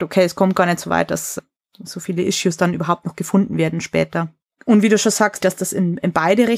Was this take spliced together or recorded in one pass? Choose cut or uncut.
cut